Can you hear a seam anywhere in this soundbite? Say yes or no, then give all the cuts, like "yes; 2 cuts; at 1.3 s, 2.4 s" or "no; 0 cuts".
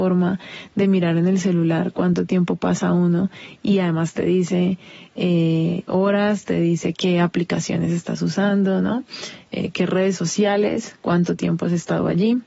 no; 0 cuts